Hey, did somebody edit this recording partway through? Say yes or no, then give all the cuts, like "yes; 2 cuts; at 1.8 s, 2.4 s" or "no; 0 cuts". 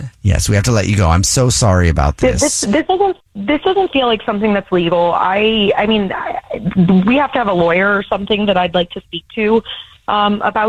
no; 0 cuts